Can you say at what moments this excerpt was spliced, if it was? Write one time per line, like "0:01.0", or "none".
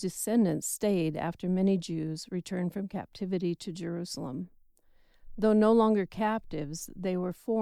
none